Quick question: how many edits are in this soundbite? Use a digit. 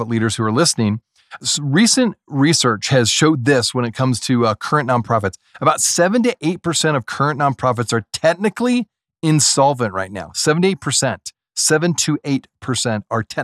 0